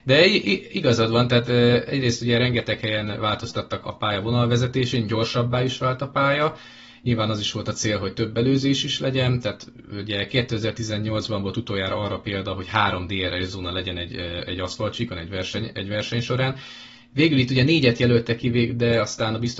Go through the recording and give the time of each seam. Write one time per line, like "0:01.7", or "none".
0:03.8

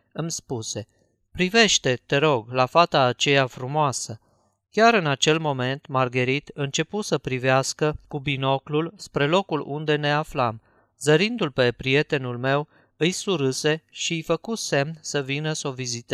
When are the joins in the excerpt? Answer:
none

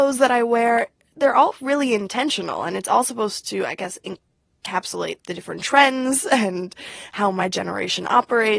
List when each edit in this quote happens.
none

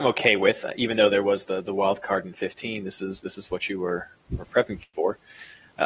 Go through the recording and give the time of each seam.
none

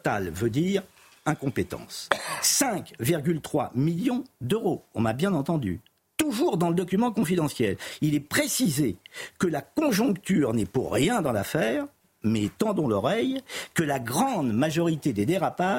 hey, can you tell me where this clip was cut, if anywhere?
none

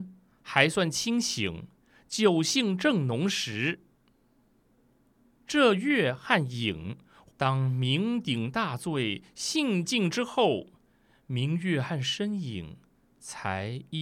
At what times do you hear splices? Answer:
0:07.3

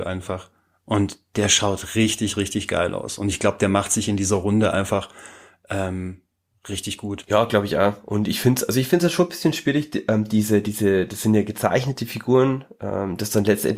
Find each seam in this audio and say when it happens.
none

